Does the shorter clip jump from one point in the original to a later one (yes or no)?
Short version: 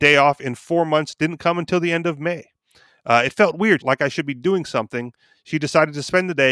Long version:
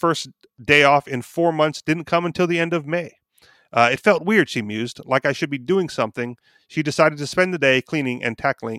yes